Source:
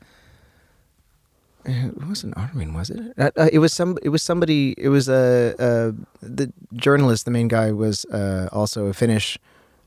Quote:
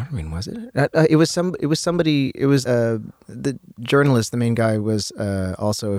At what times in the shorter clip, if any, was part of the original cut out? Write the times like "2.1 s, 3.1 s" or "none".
2.6 s